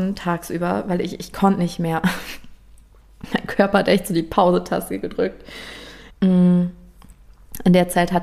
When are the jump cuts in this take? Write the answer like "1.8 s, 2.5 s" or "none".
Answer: 6.1 s